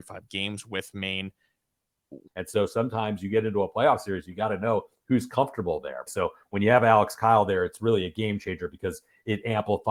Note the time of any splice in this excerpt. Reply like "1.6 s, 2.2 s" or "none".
2.3 s, 6.1 s

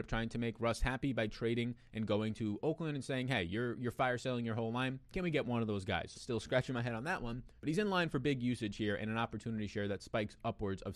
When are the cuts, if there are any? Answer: 6.1 s, 7.6 s

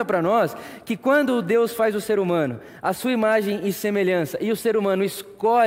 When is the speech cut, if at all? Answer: none

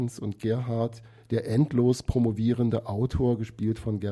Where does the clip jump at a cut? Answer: none

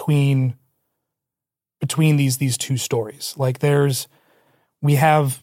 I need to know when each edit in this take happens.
none

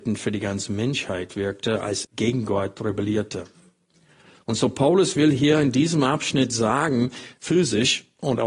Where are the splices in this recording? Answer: 2.0 s, 7.4 s

